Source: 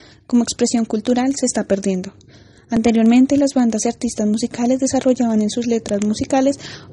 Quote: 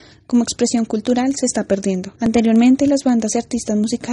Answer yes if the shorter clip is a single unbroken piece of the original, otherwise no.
no